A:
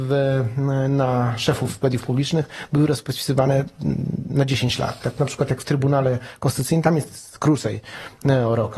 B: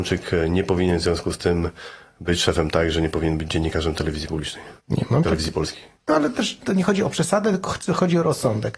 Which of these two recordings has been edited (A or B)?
B